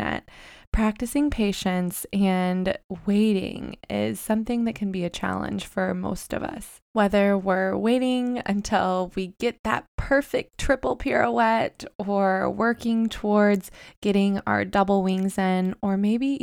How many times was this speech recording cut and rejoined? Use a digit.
1